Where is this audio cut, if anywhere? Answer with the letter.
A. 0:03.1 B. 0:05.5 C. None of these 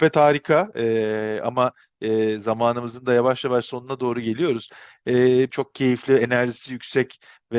B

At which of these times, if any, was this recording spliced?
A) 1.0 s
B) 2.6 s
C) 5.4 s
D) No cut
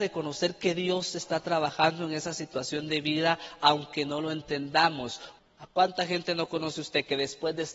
C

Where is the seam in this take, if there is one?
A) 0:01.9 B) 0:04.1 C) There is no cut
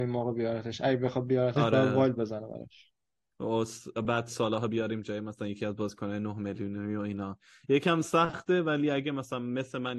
C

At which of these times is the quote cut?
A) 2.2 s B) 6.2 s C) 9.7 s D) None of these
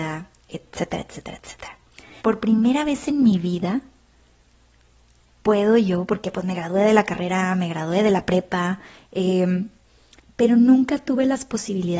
A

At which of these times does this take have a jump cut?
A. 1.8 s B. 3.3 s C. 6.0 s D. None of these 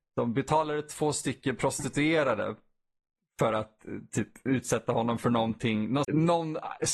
C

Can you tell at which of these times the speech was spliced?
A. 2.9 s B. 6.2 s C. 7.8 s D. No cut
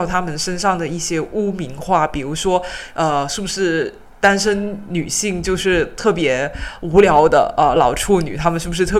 C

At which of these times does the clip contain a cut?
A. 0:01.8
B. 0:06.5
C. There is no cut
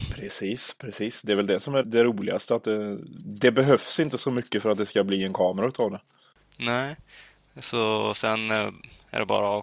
A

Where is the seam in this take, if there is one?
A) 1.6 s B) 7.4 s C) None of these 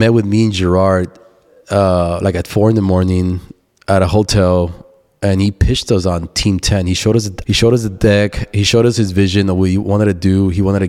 B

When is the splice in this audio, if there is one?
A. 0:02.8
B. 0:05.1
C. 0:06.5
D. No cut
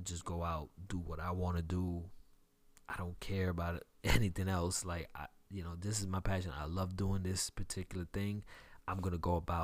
D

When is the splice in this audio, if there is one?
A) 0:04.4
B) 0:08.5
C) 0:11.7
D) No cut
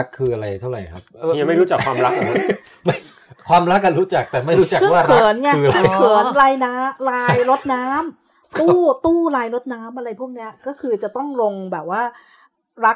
D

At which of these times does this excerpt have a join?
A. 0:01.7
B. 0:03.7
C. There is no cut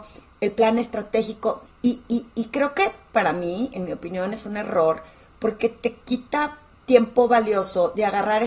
A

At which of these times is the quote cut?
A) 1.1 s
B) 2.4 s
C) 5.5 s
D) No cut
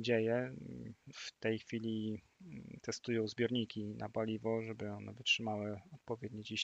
A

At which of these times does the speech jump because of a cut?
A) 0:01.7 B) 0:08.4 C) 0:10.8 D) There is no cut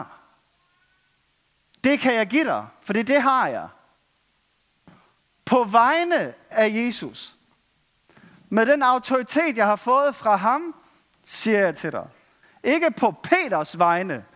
A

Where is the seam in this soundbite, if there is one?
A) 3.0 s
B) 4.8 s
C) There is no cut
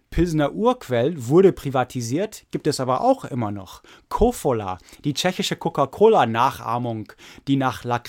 C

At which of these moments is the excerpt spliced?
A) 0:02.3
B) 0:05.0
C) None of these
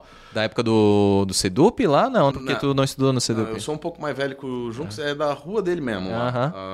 A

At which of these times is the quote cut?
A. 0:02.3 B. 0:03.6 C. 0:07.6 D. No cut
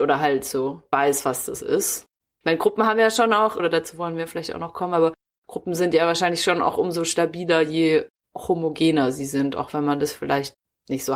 B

